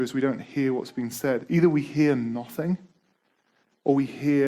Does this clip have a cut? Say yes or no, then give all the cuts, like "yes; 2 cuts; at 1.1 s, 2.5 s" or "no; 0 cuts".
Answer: no; 0 cuts